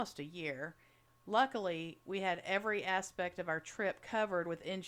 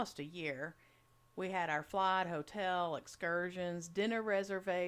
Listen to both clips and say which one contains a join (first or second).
first